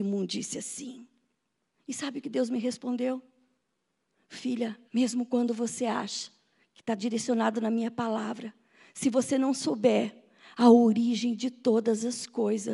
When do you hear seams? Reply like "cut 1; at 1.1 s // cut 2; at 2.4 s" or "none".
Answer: cut 1; at 1.7 s // cut 2; at 4.9 s